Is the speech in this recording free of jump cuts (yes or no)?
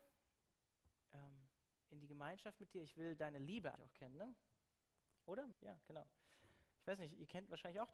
no